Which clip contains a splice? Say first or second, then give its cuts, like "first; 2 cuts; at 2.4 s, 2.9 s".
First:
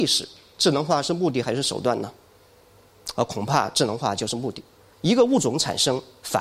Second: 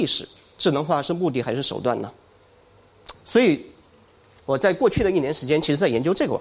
second; 1 cut; at 3.1 s